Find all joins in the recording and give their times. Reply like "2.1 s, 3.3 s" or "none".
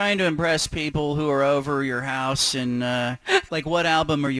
3.5 s